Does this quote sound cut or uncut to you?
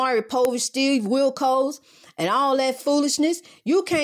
uncut